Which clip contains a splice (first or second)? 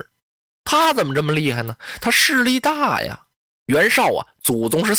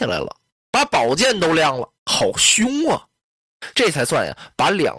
second